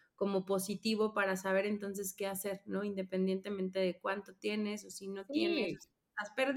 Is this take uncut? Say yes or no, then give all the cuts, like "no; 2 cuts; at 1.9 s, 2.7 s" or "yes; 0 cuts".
yes; 0 cuts